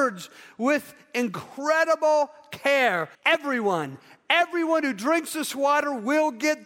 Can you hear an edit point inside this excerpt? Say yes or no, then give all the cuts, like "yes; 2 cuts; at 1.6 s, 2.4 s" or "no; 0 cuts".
yes; 1 cut; at 3.1 s